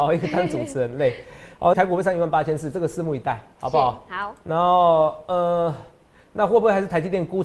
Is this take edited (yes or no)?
yes